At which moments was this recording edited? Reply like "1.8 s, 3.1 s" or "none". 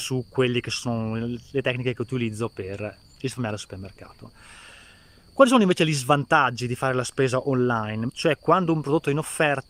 8.1 s